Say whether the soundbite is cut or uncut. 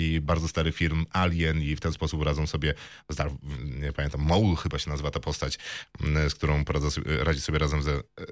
uncut